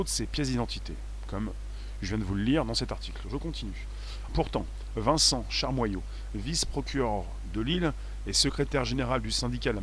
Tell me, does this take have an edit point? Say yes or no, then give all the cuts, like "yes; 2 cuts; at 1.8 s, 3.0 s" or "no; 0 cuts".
yes; 1 cut; at 4.3 s